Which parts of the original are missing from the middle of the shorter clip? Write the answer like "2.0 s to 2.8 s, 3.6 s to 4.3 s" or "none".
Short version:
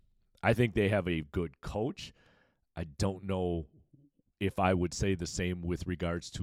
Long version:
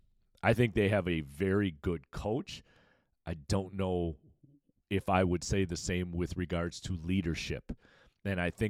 1.2 s to 1.7 s